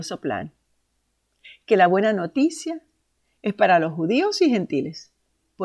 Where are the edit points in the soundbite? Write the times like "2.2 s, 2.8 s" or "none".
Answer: none